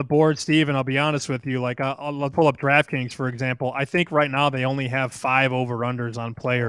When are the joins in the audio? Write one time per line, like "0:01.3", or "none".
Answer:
0:02.3